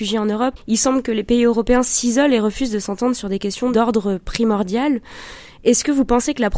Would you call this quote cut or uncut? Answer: uncut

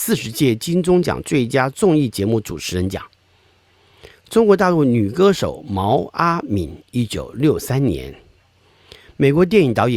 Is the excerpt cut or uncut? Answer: uncut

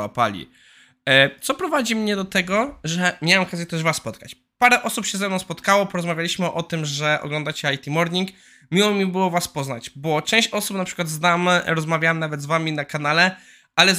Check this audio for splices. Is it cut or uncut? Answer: uncut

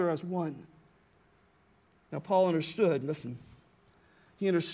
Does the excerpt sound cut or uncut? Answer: uncut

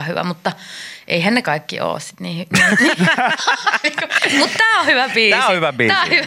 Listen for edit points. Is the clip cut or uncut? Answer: cut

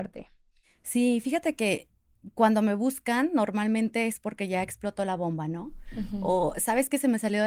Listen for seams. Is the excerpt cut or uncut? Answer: uncut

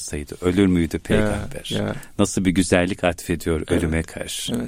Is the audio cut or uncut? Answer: uncut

